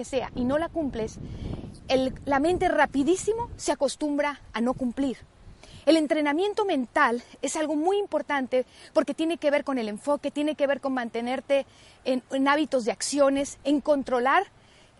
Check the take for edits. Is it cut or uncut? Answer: uncut